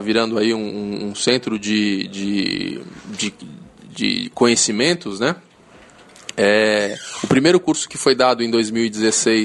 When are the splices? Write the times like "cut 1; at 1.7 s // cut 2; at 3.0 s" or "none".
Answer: none